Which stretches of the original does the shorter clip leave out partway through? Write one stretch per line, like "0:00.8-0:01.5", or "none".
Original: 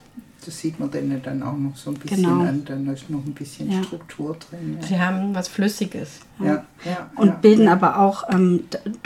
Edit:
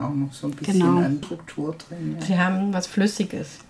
0:02.7-0:03.8